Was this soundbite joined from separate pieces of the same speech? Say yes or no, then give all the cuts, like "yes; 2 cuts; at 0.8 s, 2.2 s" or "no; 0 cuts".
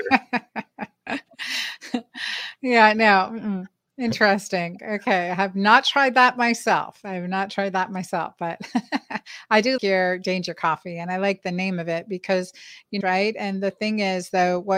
yes; 2 cuts; at 9.8 s, 13.0 s